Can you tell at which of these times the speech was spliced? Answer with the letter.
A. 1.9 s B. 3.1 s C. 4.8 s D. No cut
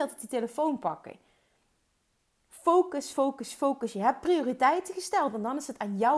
B